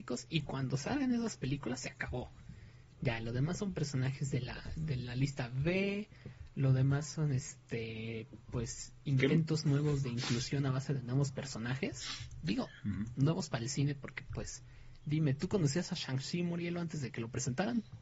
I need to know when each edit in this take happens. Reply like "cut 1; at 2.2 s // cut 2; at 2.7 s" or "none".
none